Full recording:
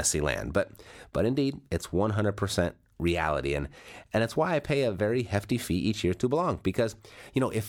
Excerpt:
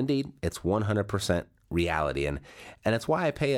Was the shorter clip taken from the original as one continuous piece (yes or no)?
yes